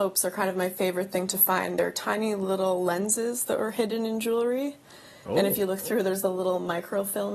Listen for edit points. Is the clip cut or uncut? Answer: uncut